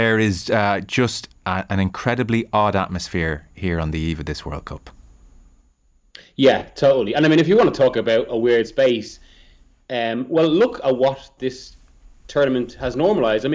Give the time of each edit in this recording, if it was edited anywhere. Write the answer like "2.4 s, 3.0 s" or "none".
none